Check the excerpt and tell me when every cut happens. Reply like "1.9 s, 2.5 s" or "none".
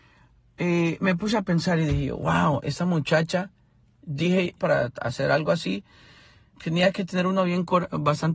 4.6 s, 6.5 s